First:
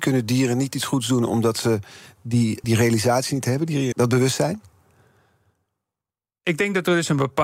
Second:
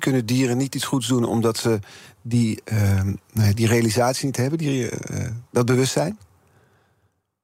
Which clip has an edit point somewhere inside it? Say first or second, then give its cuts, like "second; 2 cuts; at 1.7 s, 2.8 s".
first; 2 cuts; at 2.6 s, 3.9 s